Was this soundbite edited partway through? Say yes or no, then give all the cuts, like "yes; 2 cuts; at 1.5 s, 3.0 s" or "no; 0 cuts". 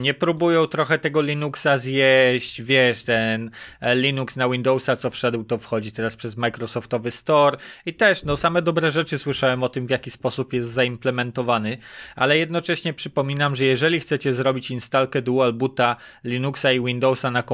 no; 0 cuts